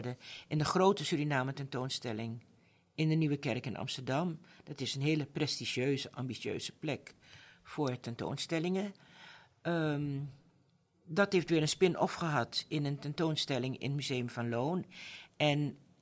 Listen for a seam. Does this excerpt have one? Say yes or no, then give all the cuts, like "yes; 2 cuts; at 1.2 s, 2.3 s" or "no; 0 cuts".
no; 0 cuts